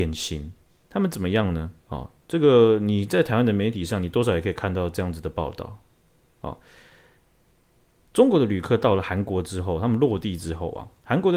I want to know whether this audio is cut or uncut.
uncut